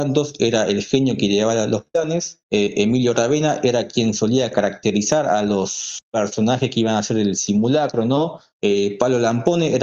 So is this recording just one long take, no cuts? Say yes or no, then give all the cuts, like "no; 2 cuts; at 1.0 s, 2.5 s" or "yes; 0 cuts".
no; 3 cuts; at 2.4 s, 6.0 s, 8.5 s